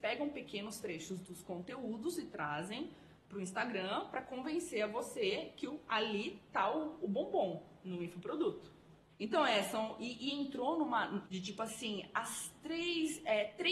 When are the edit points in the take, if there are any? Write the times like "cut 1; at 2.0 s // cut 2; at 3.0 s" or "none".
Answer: cut 1; at 9.1 s // cut 2; at 11.2 s